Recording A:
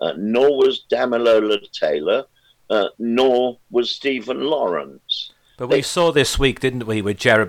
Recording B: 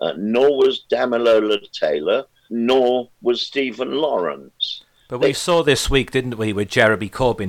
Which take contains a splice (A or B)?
B